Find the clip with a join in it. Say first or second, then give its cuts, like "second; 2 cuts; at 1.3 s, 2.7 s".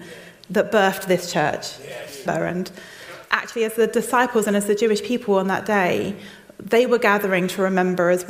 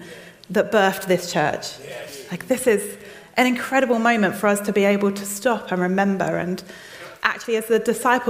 first; 1 cut; at 2.3 s